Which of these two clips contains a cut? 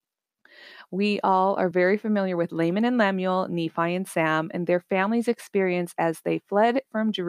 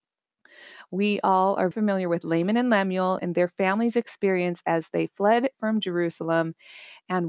second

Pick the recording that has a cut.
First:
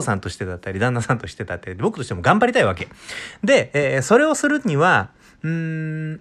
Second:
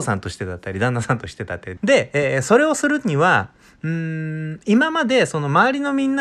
second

